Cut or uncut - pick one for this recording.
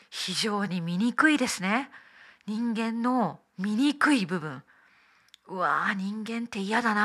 uncut